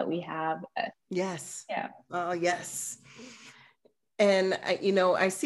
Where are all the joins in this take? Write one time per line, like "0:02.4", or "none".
0:00.9